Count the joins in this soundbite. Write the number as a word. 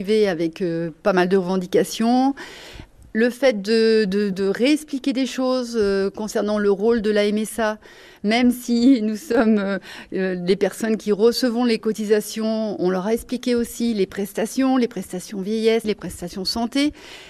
two